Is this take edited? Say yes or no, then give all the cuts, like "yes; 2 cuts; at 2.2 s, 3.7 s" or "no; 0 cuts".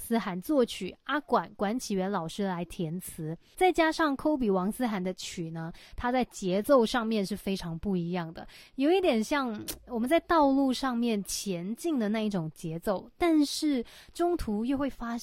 yes; 1 cut; at 3.5 s